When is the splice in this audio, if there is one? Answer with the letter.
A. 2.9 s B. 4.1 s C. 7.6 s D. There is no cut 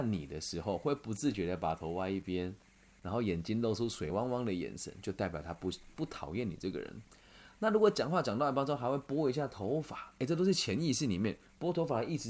D